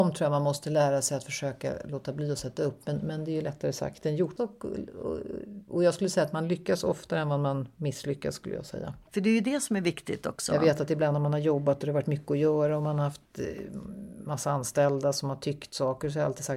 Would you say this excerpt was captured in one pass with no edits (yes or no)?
no